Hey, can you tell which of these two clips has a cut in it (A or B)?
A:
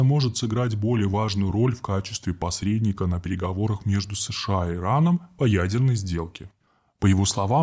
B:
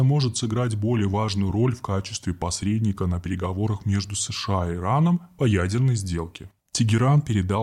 B